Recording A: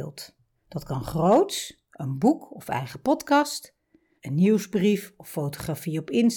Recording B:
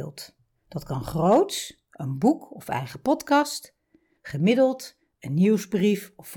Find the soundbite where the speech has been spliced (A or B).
A